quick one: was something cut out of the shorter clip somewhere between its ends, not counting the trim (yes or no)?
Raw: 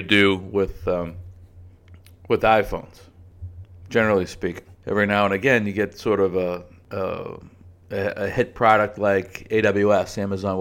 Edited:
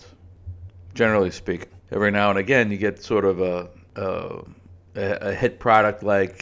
no